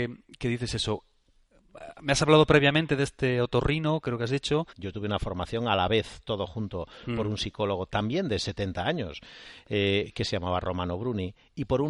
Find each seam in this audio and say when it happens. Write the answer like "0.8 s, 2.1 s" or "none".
4.7 s

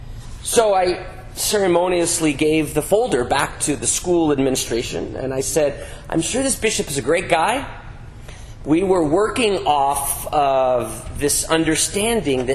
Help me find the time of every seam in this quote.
8.6 s

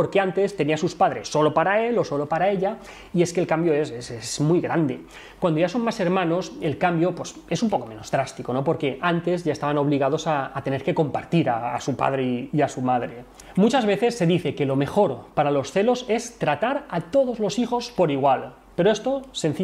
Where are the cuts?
none

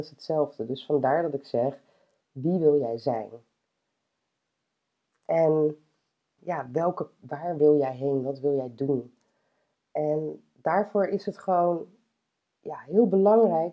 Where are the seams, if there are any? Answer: 6.4 s

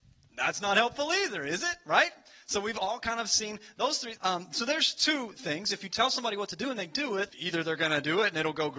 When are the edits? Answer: 4.2 s, 7.3 s

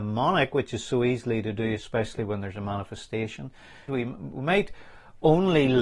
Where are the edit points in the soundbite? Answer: 3.9 s

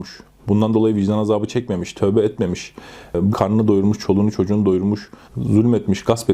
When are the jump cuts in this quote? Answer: 3.3 s, 5.3 s

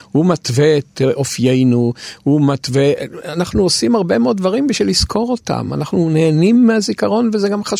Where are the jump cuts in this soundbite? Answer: none

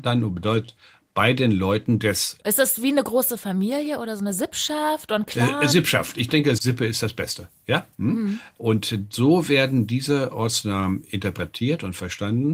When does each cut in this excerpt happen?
6.6 s

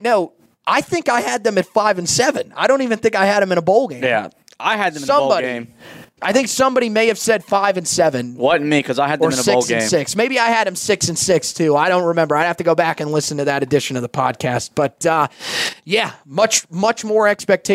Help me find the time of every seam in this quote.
none

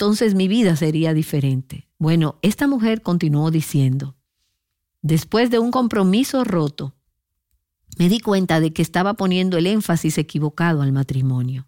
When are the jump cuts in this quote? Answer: 1.9 s

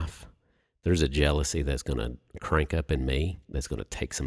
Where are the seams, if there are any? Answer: none

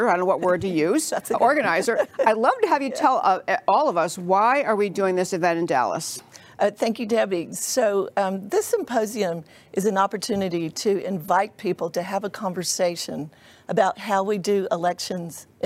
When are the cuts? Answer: none

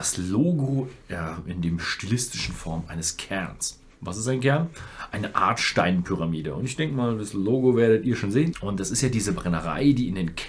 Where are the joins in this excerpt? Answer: 8.5 s

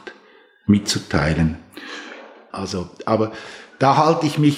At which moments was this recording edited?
2.5 s

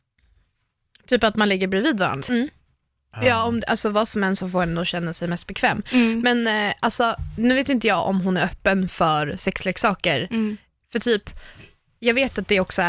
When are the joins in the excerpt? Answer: 2.2 s

